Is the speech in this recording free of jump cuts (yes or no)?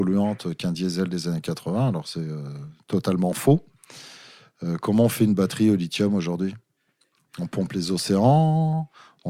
yes